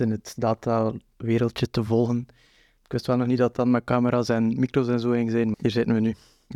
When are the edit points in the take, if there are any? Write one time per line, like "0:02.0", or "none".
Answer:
0:02.8
0:05.5